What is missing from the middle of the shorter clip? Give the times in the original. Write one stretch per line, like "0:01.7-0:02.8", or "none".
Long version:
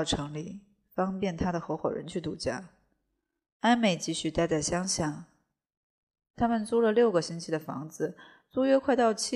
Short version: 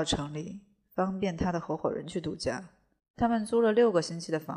0:03.0-0:06.2